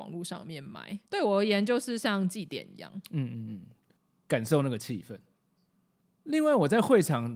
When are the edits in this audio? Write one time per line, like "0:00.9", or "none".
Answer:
0:01.1